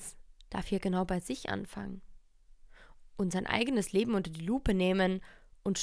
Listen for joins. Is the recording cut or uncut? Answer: uncut